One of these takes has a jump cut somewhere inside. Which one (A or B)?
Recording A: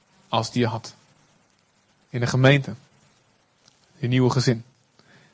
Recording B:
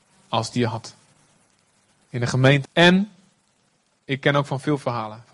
B